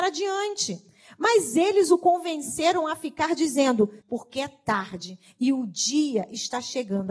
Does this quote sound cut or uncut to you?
cut